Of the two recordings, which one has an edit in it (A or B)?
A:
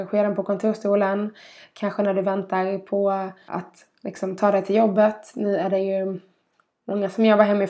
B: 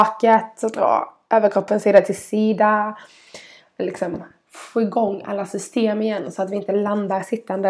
A